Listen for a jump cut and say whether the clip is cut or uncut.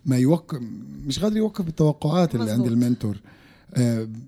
uncut